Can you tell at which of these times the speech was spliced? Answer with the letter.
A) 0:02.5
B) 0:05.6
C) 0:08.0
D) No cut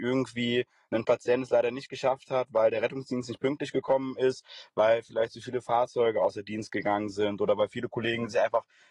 D